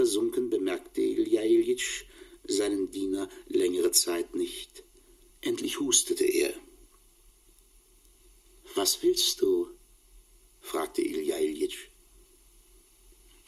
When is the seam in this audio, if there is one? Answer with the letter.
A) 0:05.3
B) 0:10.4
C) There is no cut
A